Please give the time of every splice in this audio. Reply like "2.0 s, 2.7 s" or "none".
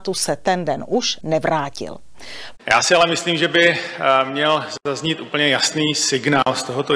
1.2 s, 2.6 s